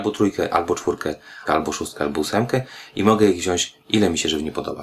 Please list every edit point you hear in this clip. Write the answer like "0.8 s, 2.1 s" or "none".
1.5 s